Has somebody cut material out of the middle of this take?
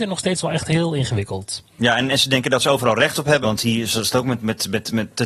yes; 1 cut; at 3.4 s

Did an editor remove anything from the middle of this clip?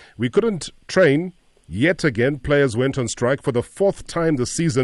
no; 0 cuts

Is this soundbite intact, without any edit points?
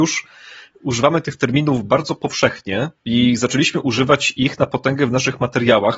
no; 1 cut; at 3.0 s

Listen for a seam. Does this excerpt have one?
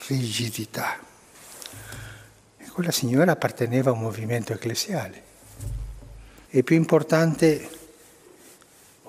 yes; 1 cut; at 6.5 s

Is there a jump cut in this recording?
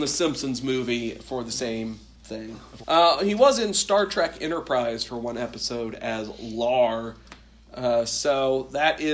yes; 1 cut; at 2.8 s

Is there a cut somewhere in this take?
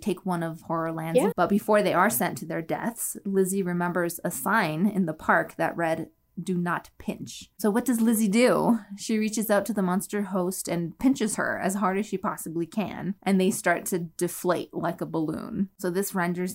yes; 2 cuts; at 1.3 s, 13.2 s

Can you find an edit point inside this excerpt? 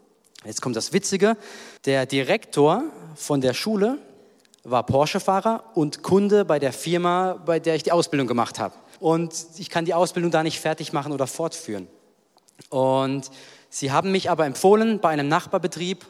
yes; 2 cuts; at 1.8 s, 9.0 s

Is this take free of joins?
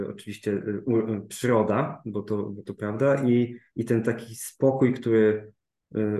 yes; 0 cuts

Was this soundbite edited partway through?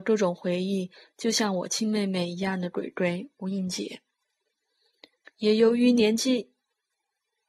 yes; 1 cut; at 5.3 s

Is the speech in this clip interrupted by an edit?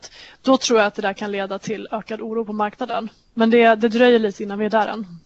no; 0 cuts

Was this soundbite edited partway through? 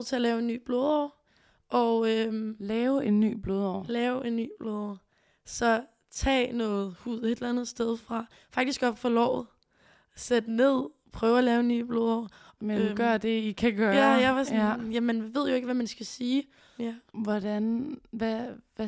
yes; 2 cuts; at 12.6 s, 16.8 s

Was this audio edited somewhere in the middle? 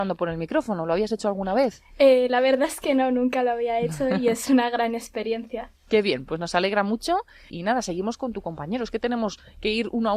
yes; 1 cut; at 7.5 s

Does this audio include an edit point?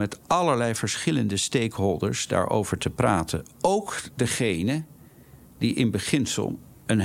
no; 0 cuts

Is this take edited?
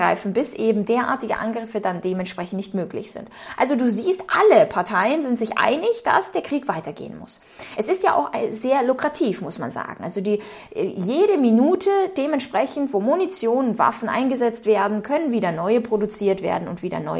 no; 0 cuts

